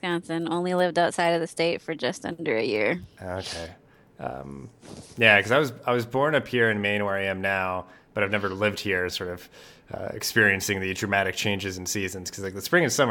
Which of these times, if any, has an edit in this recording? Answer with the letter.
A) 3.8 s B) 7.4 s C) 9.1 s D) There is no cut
C